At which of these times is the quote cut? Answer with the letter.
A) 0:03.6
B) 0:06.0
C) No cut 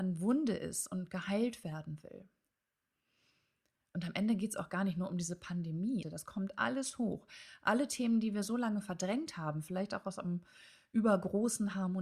B